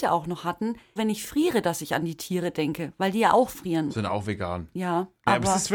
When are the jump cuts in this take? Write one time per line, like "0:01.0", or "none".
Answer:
0:01.0
0:03.9